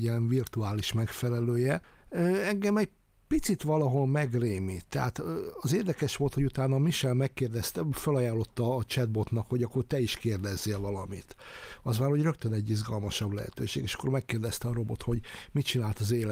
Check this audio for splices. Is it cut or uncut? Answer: uncut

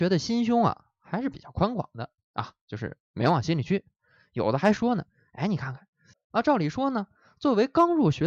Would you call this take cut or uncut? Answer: cut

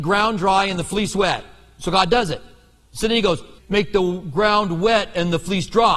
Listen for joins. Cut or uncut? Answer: cut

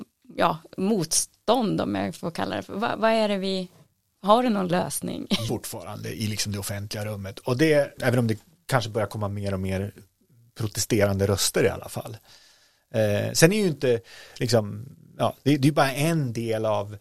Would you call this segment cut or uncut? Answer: cut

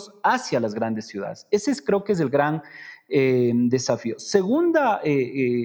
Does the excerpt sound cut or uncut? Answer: uncut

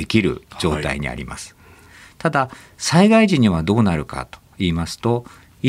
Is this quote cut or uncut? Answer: uncut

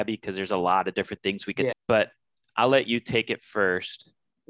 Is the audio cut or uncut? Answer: cut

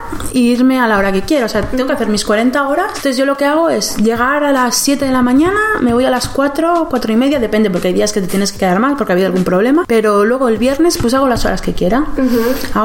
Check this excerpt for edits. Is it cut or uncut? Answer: uncut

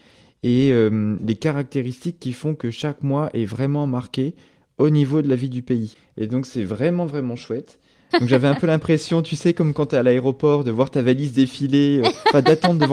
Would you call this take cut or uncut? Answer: cut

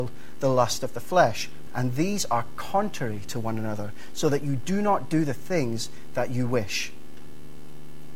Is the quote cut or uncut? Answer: cut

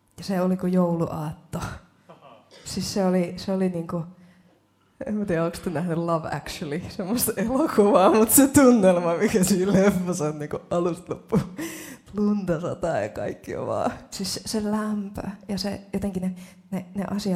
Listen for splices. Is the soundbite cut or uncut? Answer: uncut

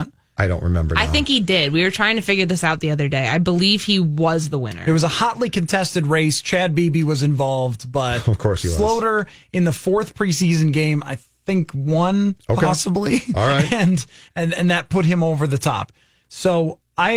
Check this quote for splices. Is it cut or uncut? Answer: uncut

